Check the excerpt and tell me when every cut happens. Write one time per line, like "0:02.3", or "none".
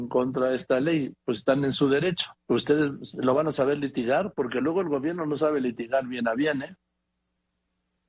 0:02.4